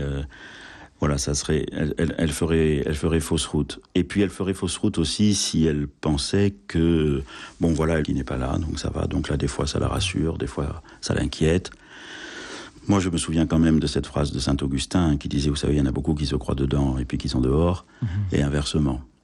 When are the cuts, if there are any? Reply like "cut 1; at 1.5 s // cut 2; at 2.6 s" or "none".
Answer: cut 1; at 8.0 s